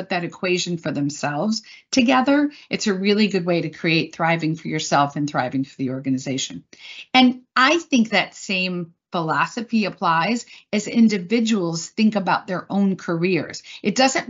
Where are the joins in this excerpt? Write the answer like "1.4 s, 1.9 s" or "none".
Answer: none